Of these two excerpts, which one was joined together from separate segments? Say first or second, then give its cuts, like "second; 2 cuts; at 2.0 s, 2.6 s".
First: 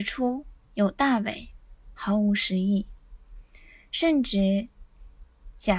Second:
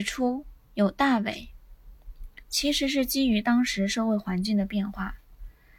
first; 1 cut; at 2.0 s